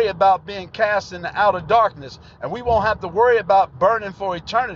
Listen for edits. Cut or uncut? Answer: uncut